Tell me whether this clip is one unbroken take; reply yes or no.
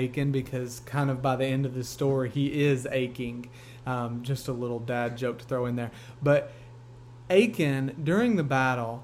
yes